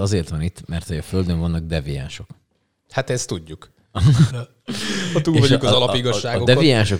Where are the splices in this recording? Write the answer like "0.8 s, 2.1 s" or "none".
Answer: 4.3 s